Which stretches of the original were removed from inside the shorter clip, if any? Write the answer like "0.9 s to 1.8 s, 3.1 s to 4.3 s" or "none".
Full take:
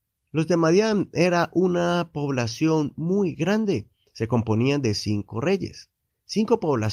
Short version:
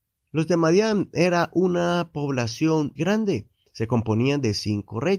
3.0 s to 3.4 s